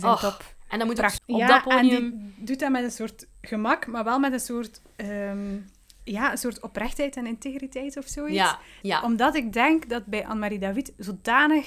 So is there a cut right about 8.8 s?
yes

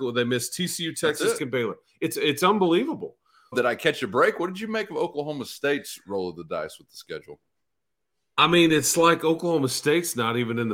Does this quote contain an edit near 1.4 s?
yes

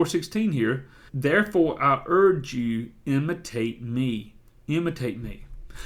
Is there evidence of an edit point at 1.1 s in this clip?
yes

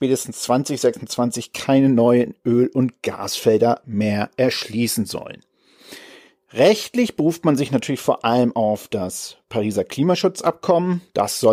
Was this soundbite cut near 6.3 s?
no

